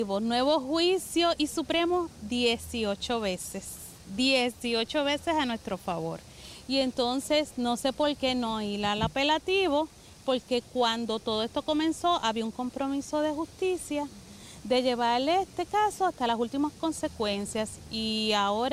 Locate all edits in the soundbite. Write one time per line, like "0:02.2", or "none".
none